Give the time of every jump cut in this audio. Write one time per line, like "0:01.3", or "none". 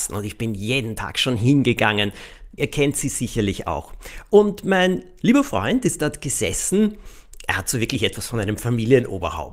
0:02.6